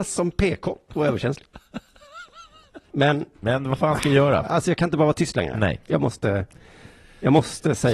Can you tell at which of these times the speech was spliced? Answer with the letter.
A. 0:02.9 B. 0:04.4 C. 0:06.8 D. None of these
A